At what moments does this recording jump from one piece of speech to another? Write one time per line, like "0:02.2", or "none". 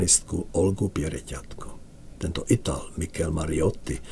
0:02.2